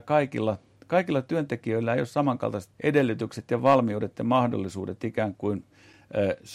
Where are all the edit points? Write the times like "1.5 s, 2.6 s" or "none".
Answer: 2.7 s